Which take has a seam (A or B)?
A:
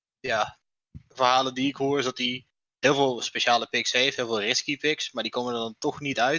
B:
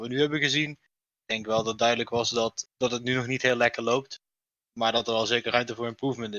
B